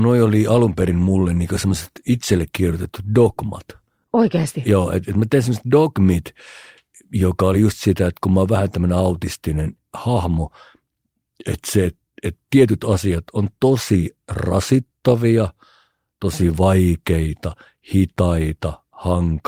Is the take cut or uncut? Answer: uncut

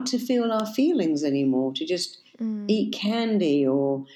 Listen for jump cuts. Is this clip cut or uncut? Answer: uncut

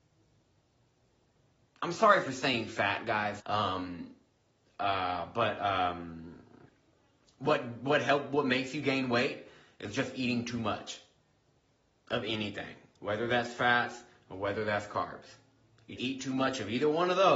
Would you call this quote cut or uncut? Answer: cut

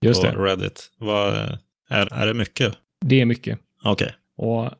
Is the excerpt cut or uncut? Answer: cut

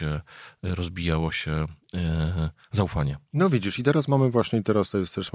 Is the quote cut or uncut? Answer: uncut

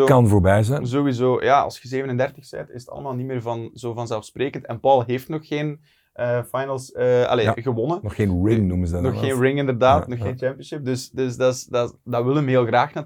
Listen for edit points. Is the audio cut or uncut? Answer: uncut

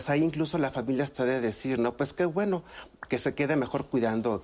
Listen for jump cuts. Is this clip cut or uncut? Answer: uncut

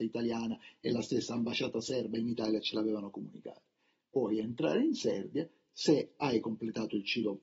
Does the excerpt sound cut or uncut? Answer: uncut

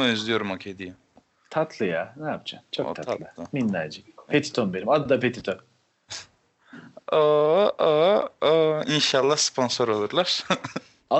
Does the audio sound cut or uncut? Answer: uncut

